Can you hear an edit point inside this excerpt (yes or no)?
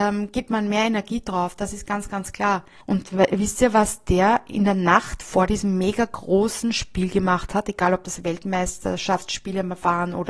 yes